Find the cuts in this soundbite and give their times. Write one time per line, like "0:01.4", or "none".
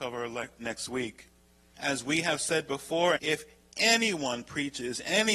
0:01.7
0:03.2